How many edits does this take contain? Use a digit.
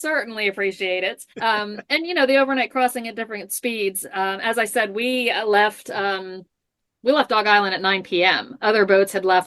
1